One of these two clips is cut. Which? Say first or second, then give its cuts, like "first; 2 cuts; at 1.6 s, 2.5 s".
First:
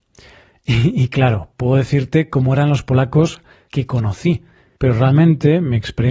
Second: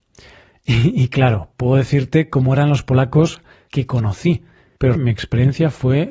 second; 1 cut; at 5.0 s